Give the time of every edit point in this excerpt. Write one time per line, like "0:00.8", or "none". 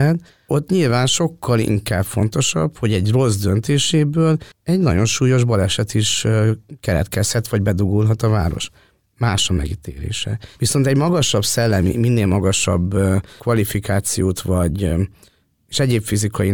0:10.5